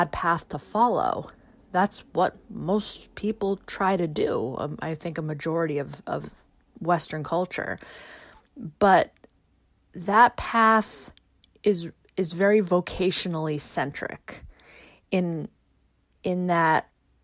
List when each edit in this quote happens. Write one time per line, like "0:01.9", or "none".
none

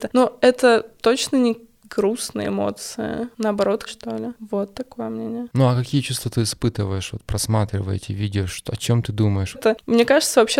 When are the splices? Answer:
0:03.9
0:09.5

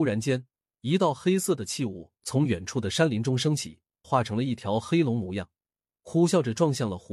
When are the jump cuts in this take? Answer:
0:04.0

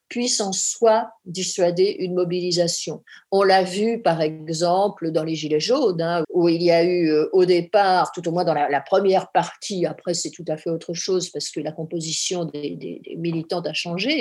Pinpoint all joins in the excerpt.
0:06.2

